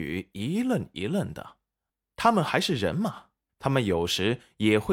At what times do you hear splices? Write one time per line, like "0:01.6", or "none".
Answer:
0:03.5

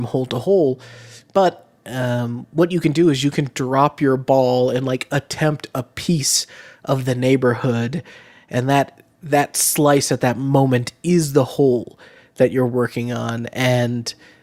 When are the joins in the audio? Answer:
none

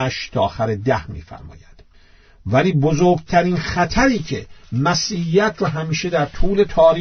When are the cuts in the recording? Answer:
none

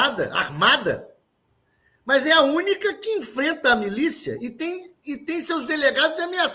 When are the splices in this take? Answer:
none

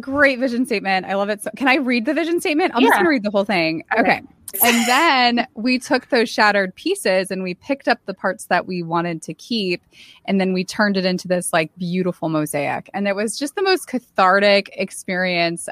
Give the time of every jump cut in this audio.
0:04.5

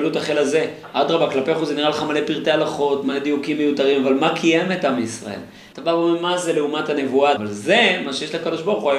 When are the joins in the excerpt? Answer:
0:05.7
0:07.4

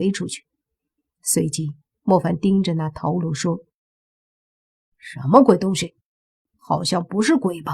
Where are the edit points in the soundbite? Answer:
none

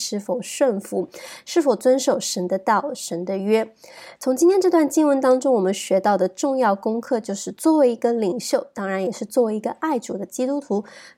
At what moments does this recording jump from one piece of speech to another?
0:04.2

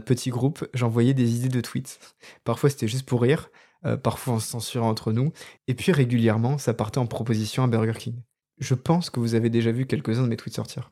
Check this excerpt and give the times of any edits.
none

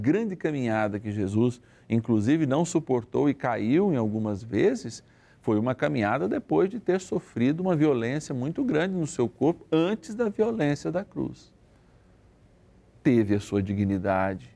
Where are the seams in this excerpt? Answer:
none

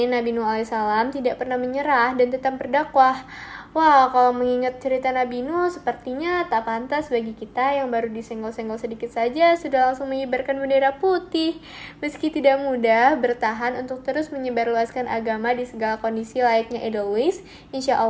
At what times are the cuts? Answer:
none

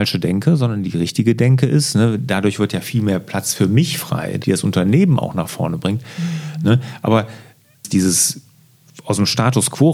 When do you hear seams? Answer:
0:04.4

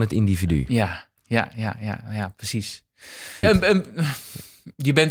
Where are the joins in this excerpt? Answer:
0:01.2
0:03.4

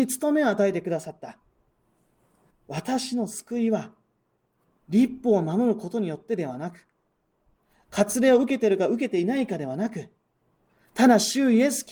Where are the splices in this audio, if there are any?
0:02.5

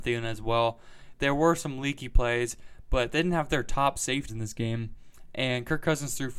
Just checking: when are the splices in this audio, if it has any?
0:04.3

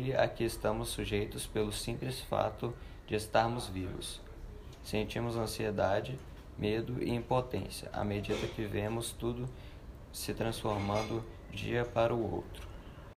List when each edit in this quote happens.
0:04.7
0:11.5

